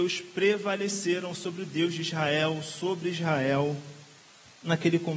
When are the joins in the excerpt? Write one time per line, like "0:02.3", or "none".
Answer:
none